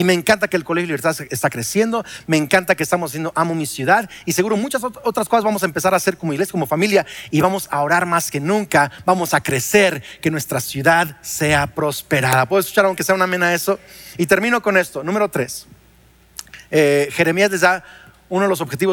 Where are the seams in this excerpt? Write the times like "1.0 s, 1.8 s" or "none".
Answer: none